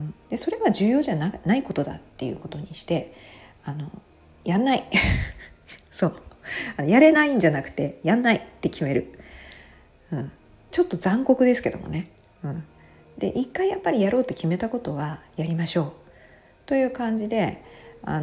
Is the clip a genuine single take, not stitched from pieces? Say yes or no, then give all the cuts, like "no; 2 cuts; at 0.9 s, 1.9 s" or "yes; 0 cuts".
yes; 0 cuts